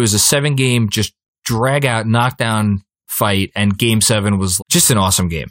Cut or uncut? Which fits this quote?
cut